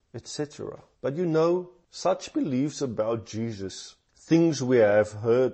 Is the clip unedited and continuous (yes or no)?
no